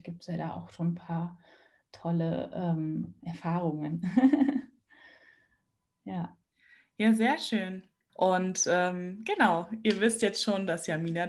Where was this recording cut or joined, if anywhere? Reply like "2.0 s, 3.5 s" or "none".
8.1 s